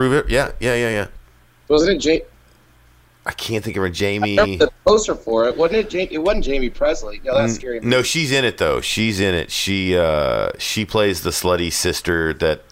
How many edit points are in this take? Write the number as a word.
one